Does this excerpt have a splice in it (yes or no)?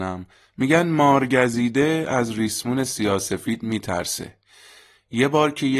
no